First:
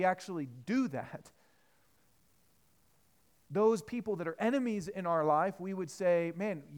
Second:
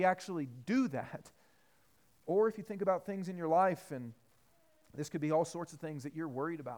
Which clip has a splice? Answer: second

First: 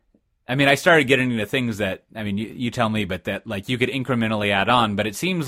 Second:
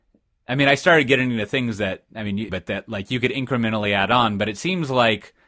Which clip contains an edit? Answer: second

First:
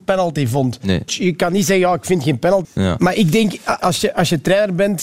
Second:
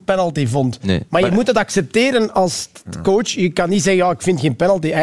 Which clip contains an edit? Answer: first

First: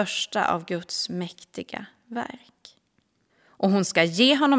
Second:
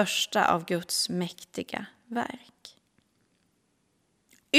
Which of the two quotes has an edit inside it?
first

